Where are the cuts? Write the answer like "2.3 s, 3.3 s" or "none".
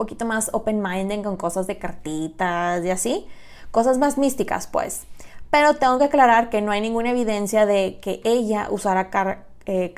none